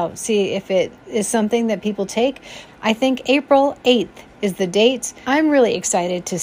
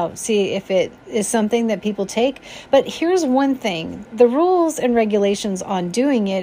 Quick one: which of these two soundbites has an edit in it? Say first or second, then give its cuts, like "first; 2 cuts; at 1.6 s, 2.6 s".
first; 2 cuts; at 2.7 s, 5.2 s